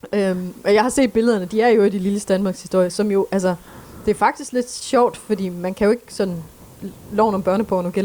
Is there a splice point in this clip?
no; 0 cuts

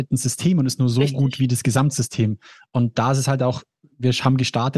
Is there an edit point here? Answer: no; 0 cuts

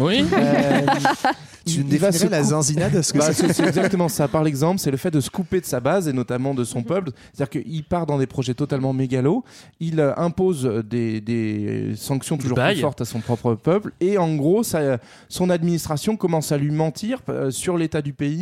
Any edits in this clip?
no; 0 cuts

